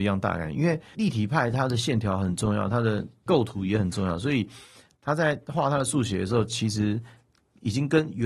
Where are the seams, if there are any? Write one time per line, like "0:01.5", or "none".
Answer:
0:00.9